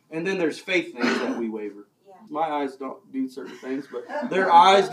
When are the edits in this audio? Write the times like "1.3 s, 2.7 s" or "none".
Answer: 2.3 s